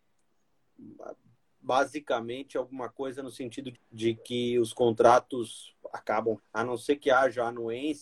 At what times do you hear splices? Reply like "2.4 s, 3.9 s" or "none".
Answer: 3.7 s, 6.4 s